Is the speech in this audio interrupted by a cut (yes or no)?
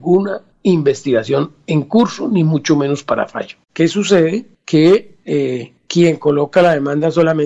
yes